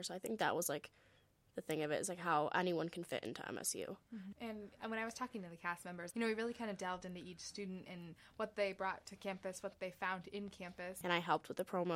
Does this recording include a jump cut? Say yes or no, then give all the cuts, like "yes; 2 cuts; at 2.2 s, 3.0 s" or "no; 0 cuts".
yes; 3 cuts; at 4.3 s, 6.1 s, 11.0 s